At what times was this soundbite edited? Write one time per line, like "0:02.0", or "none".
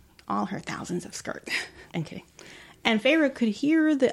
0:01.9